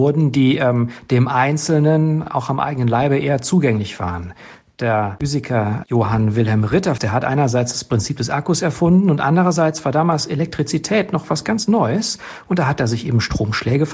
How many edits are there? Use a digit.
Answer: 1